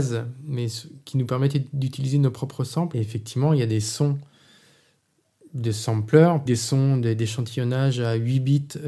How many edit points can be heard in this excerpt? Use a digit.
2